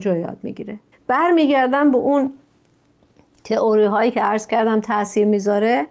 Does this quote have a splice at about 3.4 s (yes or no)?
no